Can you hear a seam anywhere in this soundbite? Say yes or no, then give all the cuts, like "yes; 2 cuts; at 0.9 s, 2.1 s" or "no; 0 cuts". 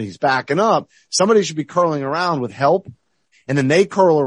yes; 1 cut; at 3.3 s